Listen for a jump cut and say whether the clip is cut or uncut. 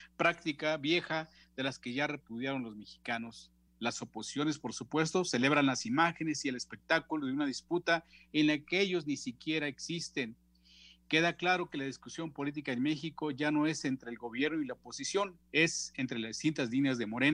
uncut